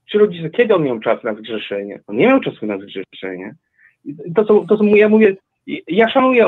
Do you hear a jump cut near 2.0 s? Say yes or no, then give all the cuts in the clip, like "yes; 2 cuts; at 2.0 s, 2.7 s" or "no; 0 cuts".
yes; 1 cut; at 2.0 s